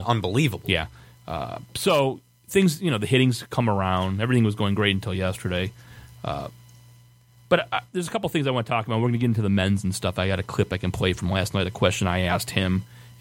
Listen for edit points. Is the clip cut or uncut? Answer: uncut